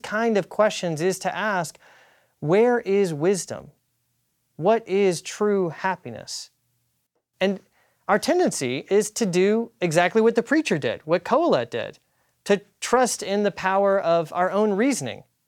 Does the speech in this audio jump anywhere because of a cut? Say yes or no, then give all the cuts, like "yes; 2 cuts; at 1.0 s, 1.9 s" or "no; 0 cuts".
no; 0 cuts